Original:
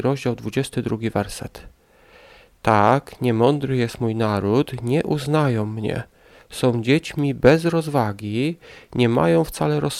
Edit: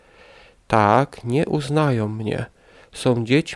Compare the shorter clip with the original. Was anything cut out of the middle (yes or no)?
yes